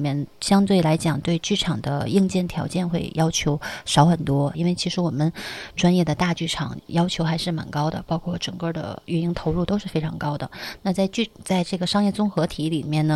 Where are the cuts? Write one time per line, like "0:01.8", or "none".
0:04.5